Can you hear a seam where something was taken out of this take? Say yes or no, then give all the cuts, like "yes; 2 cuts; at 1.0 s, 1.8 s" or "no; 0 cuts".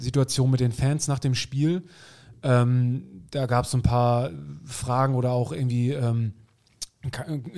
no; 0 cuts